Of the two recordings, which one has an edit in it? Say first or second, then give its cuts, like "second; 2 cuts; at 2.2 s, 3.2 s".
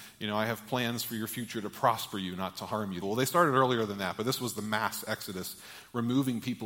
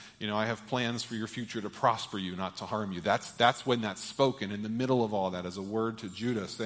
first; 1 cut; at 3.0 s